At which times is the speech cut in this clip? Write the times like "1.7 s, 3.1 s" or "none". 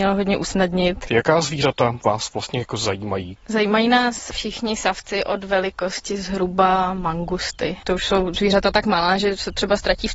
7.8 s